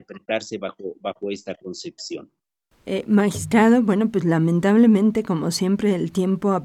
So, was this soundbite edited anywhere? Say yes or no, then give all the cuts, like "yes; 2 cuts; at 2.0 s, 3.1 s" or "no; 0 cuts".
yes; 1 cut; at 2.8 s